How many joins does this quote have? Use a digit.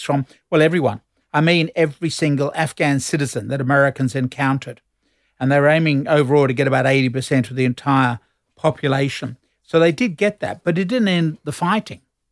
0